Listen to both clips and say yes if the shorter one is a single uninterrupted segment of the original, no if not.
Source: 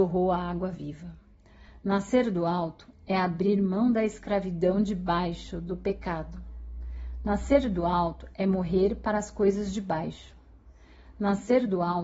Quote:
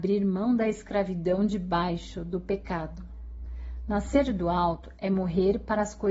yes